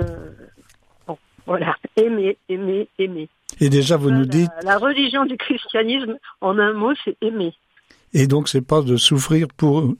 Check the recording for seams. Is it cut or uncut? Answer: uncut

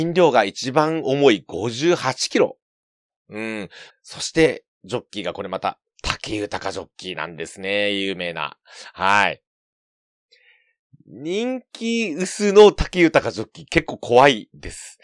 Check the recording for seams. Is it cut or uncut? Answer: cut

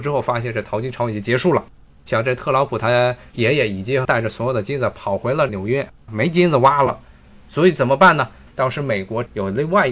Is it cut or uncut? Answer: cut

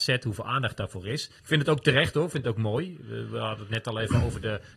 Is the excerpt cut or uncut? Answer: cut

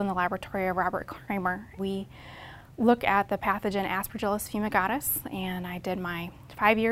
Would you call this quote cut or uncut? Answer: cut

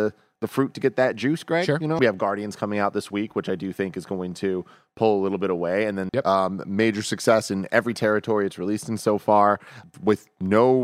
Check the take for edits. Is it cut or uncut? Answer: cut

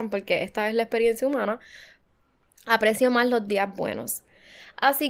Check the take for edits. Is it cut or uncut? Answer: uncut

